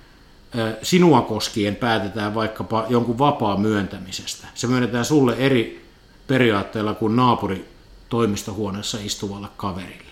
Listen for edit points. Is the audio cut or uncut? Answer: uncut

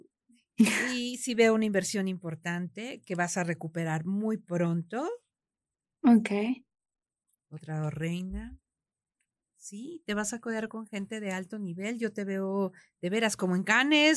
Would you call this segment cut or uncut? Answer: uncut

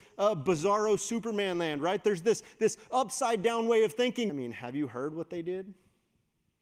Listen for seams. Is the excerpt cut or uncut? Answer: cut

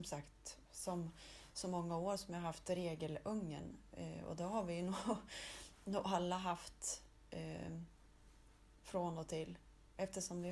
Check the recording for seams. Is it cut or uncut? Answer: uncut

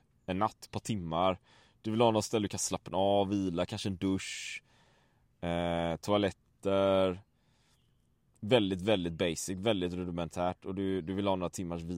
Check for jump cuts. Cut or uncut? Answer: uncut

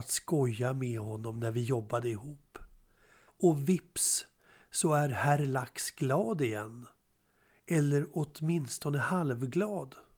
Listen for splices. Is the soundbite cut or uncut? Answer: cut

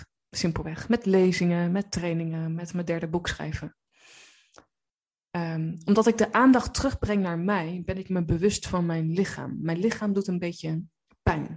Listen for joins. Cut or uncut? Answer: uncut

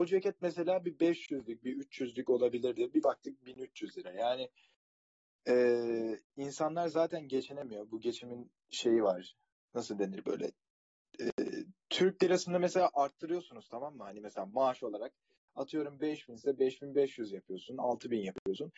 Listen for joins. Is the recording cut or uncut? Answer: uncut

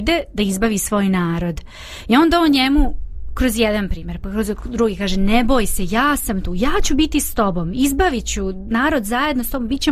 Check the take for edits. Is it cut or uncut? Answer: uncut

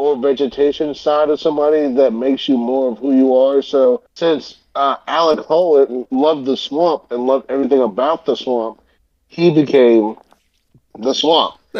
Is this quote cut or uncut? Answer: cut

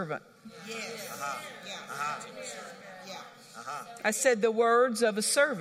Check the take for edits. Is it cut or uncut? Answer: uncut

